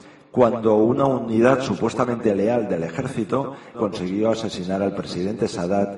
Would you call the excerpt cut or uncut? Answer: cut